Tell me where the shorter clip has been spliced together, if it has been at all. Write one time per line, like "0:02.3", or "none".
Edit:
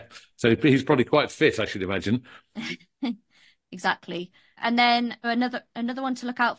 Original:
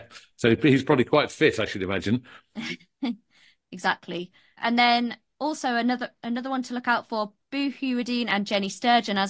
0:05.2